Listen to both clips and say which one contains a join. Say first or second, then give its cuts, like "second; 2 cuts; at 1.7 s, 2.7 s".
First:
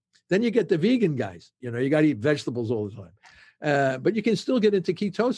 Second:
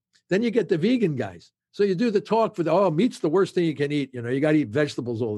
first; 1 cut; at 1.6 s